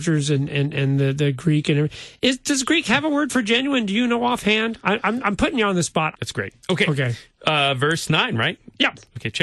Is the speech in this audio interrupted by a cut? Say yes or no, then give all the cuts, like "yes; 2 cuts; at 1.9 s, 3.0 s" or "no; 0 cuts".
yes; 1 cut; at 6.1 s